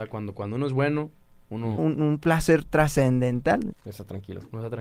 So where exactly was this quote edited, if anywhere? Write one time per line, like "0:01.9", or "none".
0:01.8
0:03.7